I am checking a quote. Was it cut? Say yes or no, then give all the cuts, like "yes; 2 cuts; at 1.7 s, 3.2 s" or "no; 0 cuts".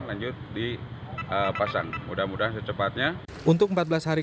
no; 0 cuts